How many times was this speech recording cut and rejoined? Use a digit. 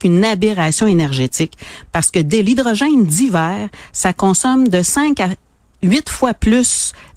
0